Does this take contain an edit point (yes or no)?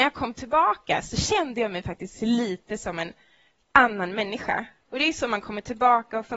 no